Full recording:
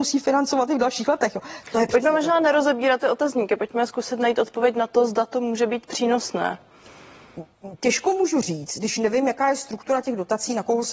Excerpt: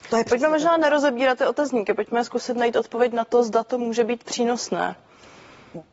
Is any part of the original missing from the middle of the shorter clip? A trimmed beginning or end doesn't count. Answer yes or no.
no